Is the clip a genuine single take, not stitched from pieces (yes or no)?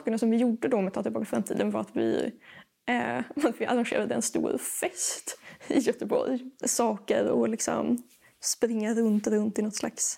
no